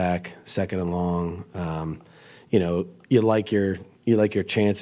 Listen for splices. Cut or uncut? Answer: uncut